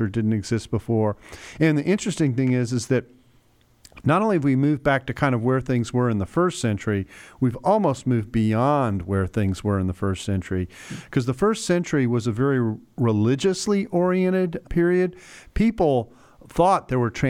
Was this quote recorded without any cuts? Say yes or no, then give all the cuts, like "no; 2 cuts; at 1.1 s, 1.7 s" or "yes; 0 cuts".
no; 1 cut; at 14.6 s